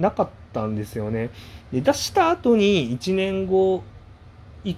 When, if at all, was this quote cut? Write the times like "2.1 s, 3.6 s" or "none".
none